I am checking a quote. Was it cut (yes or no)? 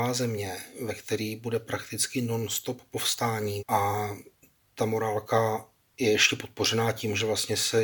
yes